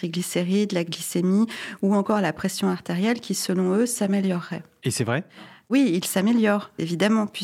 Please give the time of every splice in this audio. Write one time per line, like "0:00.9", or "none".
none